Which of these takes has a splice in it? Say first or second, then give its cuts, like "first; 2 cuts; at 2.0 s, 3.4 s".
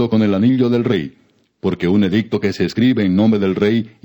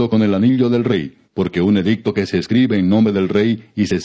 second; 1 cut; at 1.2 s